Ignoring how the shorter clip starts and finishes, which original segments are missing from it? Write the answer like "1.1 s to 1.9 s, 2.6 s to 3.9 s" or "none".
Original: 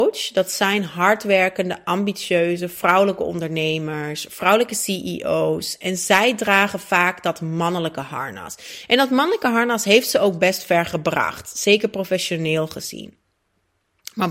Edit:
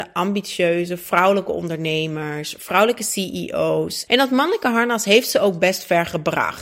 5.8 s to 8.9 s